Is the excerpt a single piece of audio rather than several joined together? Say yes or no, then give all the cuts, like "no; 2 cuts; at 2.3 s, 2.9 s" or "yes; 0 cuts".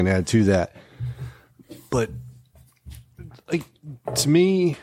yes; 0 cuts